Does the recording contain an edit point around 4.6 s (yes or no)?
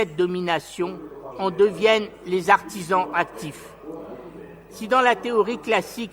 no